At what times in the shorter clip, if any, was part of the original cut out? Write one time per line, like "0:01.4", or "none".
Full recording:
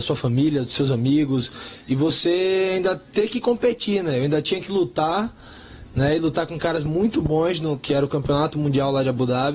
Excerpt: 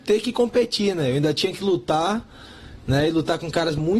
none